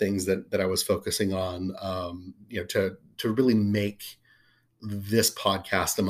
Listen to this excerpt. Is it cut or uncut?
cut